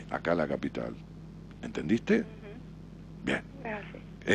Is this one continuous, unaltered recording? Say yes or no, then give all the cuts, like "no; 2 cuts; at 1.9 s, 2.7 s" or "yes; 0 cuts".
no; 1 cut; at 1.5 s